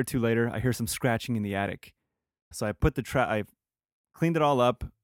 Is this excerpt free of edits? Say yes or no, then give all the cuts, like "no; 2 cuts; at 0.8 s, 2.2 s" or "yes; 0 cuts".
no; 1 cut; at 2.5 s